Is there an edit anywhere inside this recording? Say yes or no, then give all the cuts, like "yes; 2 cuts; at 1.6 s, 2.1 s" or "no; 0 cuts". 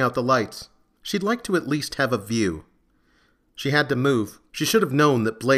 yes; 2 cuts; at 1.0 s, 4.5 s